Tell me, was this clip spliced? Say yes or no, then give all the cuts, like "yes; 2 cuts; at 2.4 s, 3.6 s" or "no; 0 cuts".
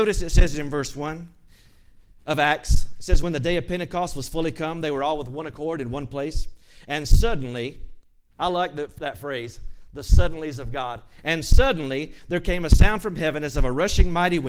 no; 0 cuts